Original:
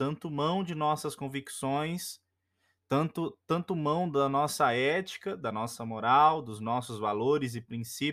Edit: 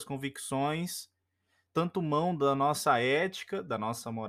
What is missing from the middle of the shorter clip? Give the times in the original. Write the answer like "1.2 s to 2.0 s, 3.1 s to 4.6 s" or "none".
2.8 s to 3.4 s